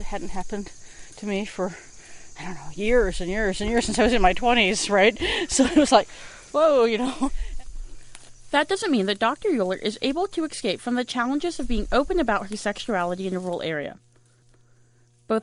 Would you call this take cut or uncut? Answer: uncut